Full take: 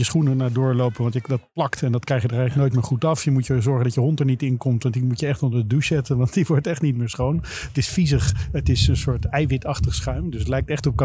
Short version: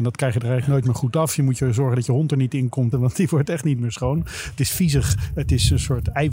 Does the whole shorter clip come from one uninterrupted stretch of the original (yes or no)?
no